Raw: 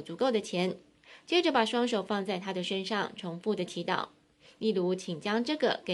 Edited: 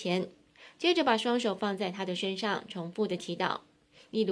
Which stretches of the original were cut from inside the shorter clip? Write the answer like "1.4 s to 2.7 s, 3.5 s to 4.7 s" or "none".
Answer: none